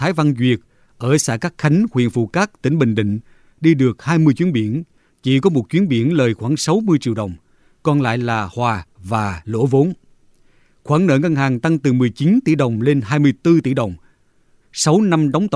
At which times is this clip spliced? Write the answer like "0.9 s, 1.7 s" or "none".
14.6 s

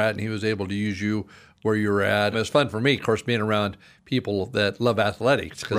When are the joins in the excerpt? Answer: 2.3 s

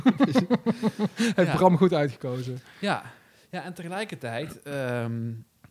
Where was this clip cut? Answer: none

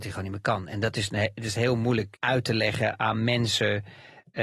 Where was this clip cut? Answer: 2.2 s

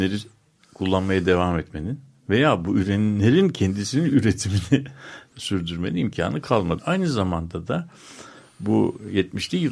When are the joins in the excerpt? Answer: 6.8 s

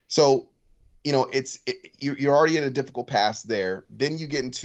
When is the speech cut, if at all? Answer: none

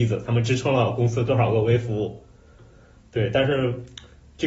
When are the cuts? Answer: none

